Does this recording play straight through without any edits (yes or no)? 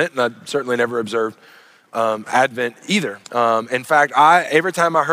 no